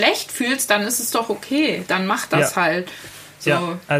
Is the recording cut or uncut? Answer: uncut